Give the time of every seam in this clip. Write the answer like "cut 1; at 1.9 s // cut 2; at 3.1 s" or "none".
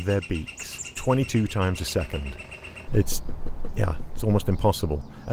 cut 1; at 2.9 s